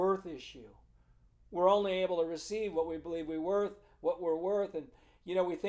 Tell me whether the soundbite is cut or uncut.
uncut